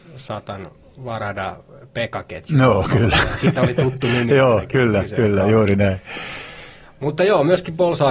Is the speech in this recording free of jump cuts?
yes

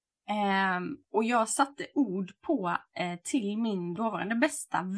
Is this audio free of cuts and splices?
yes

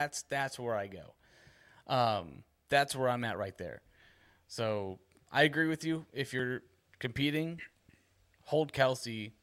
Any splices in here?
no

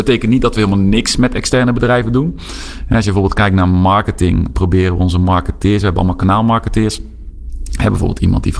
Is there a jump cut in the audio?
no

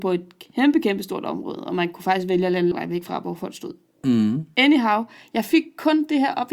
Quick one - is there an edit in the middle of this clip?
yes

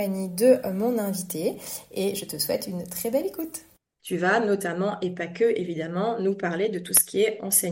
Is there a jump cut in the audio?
yes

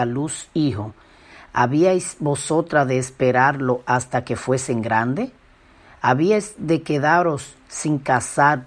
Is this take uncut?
yes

